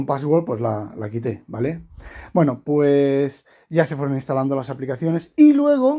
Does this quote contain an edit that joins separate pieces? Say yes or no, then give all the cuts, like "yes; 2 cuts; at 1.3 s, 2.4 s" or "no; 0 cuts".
no; 0 cuts